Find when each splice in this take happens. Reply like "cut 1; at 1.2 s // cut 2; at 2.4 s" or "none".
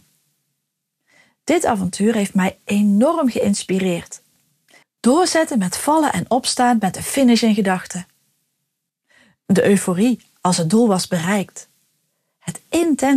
cut 1; at 4.8 s